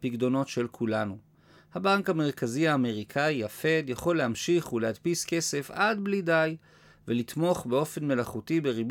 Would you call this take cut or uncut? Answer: uncut